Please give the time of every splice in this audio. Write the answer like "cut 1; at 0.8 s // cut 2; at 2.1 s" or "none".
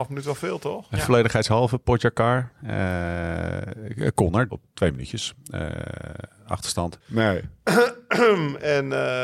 cut 1; at 4.5 s // cut 2; at 7.0 s